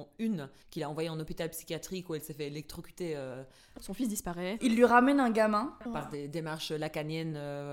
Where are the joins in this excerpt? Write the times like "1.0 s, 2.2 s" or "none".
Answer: 3.8 s, 5.9 s